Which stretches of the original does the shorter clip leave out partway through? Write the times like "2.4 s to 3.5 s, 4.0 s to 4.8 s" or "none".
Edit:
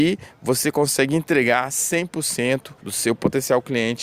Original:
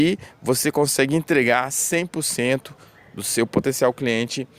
2.8 s to 3.1 s